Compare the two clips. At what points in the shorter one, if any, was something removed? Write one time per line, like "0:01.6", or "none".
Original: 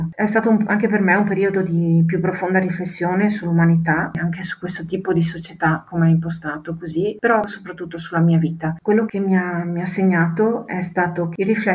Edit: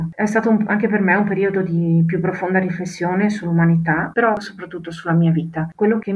0:04.1